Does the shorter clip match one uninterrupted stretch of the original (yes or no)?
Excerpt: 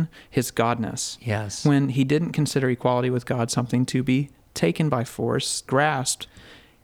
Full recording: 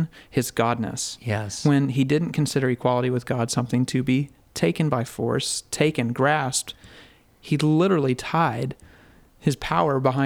no